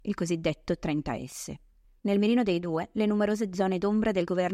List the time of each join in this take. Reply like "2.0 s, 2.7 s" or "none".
2.0 s